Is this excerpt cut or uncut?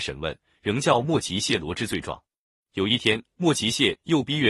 cut